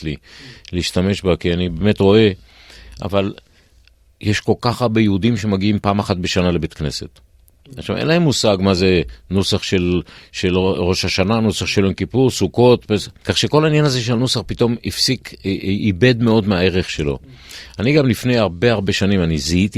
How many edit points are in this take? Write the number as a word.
one